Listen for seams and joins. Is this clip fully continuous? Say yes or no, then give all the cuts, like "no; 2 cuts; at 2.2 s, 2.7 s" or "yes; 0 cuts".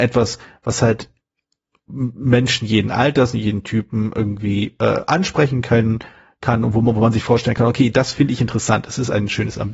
yes; 0 cuts